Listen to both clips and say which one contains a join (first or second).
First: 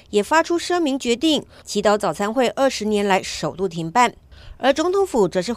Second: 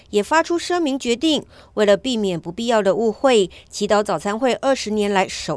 first